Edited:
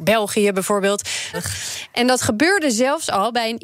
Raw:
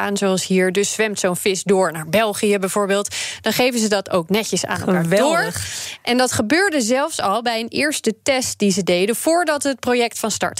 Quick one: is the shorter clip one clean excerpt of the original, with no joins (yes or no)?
no